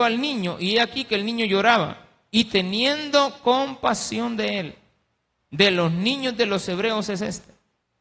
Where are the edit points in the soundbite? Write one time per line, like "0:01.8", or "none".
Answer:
0:05.4